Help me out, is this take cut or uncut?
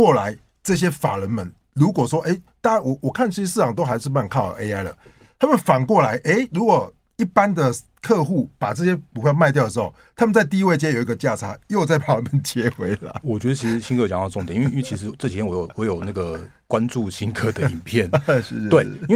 uncut